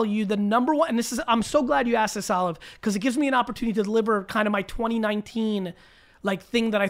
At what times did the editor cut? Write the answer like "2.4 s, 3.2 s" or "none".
none